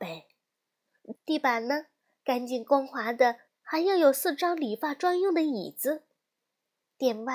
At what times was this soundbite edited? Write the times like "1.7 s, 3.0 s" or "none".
1.1 s, 3.5 s